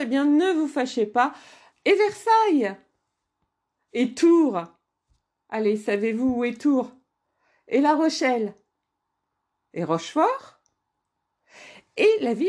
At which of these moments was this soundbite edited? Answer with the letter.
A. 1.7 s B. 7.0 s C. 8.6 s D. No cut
A